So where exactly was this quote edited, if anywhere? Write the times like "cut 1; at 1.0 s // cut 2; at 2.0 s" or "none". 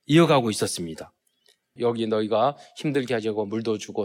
cut 1; at 1.8 s